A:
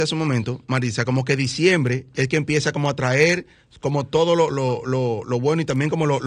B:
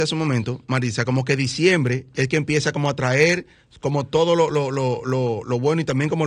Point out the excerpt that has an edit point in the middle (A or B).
A